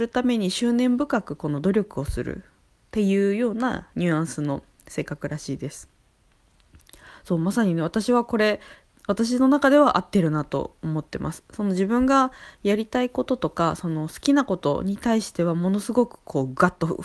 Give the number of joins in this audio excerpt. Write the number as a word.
zero